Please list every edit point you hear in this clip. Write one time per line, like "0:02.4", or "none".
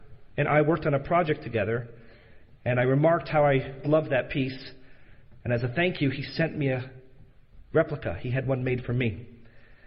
0:03.8

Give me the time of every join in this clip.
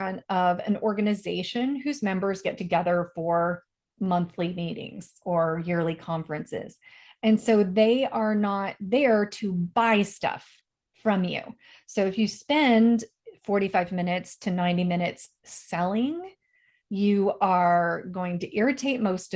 none

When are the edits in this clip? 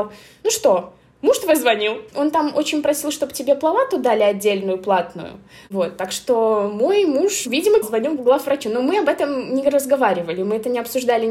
0:02.1
0:07.8

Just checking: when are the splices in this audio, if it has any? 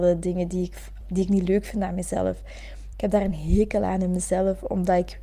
0:01.0
0:02.9

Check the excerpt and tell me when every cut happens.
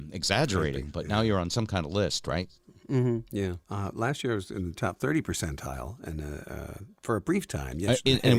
0:03.6

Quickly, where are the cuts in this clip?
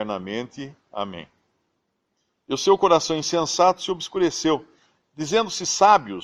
0:02.3

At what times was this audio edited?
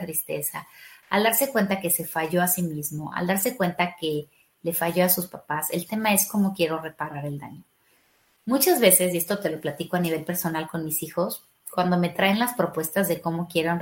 none

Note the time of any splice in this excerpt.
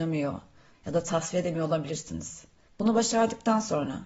0:02.7

